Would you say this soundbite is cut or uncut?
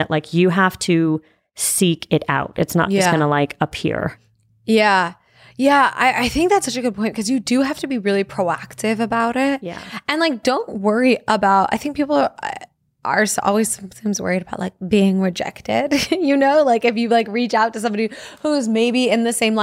uncut